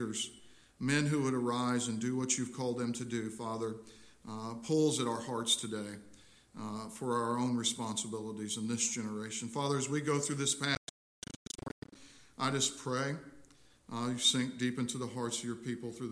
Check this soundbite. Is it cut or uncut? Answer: uncut